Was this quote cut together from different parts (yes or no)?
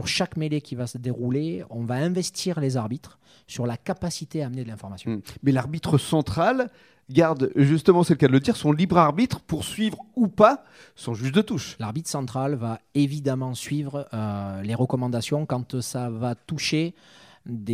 no